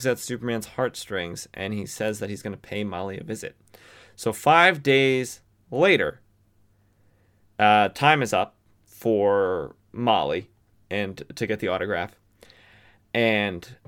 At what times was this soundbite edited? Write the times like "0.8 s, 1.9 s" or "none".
none